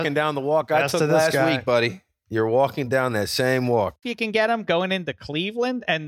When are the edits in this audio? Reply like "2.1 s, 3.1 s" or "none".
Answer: 4.0 s

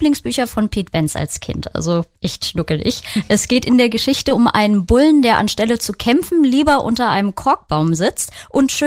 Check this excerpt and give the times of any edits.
none

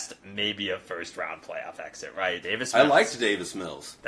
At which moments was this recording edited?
2.4 s

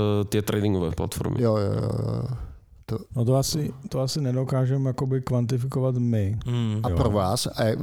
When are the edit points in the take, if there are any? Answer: 3.1 s

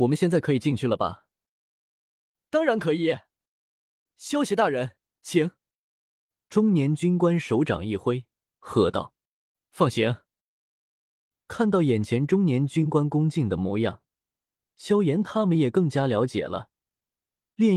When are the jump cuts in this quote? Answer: none

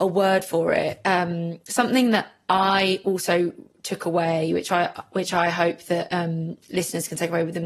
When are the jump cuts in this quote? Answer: none

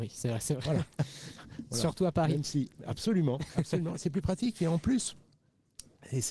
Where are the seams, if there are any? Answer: none

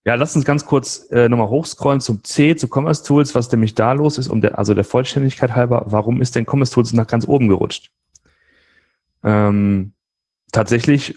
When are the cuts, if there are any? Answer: none

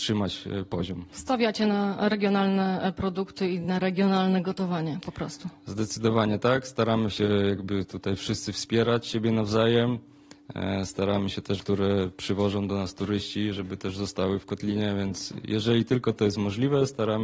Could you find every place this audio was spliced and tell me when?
11.6 s

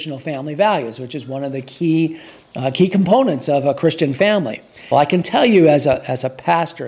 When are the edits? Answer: 4.9 s

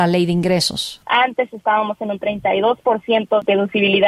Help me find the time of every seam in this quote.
1.0 s

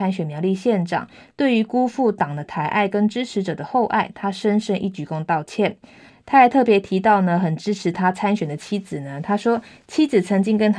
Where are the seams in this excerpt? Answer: 6.1 s

